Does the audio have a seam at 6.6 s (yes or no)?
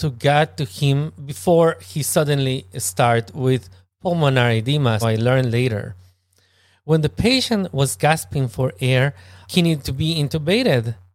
no